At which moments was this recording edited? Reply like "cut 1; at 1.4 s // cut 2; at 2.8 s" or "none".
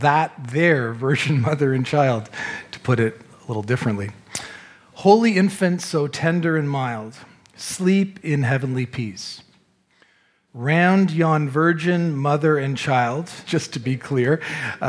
cut 1; at 10.5 s // cut 2; at 13.4 s